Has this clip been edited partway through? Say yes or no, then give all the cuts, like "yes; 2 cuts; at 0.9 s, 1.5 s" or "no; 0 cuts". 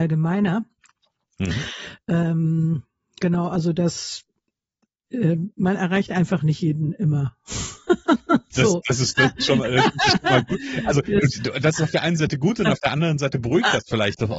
yes; 1 cut; at 5.5 s